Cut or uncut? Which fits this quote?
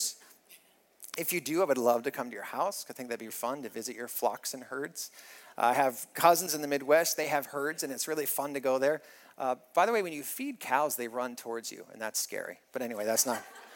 cut